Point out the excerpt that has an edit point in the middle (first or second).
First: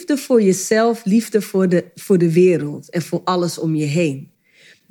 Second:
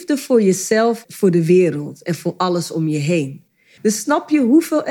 second